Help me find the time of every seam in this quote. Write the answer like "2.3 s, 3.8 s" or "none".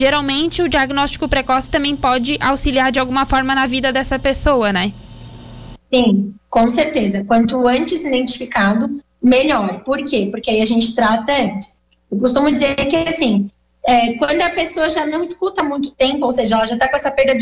5.8 s